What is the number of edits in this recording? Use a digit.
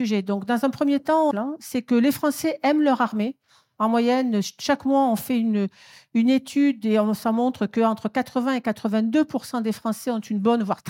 1